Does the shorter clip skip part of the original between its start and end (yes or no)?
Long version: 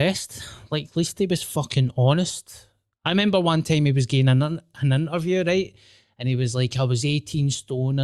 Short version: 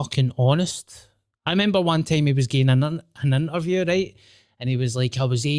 no